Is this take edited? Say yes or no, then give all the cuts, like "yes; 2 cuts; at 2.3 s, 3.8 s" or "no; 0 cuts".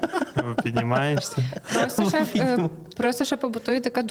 no; 0 cuts